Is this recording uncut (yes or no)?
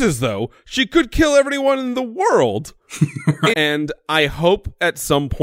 no